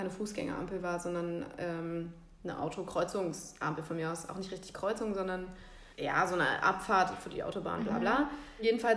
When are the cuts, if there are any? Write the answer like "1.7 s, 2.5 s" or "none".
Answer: 5.9 s